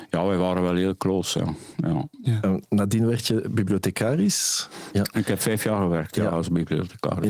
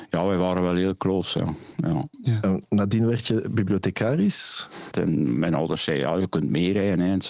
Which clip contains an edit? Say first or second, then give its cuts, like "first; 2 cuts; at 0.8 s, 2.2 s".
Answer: second; 1 cut; at 4.9 s